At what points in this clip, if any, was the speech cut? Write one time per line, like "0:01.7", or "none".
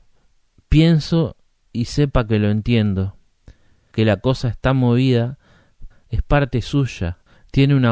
0:03.9
0:05.9